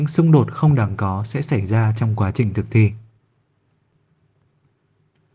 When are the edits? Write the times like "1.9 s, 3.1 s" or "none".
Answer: none